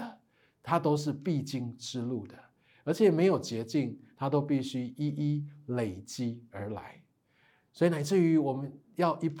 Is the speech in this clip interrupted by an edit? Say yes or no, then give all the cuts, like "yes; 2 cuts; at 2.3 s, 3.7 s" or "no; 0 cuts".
no; 0 cuts